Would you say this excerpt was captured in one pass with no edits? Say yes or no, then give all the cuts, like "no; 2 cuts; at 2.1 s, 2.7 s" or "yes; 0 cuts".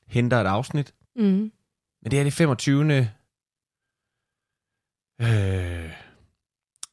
yes; 0 cuts